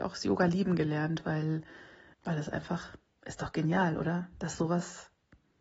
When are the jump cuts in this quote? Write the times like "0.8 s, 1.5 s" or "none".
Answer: 2.1 s